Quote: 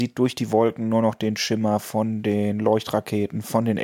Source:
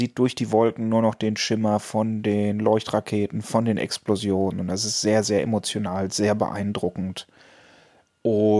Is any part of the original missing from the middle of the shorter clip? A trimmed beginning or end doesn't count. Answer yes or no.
no